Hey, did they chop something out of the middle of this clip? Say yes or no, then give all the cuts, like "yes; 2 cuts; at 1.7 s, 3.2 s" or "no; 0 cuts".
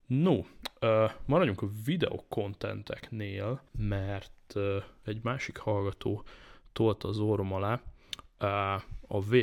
yes; 1 cut; at 3.7 s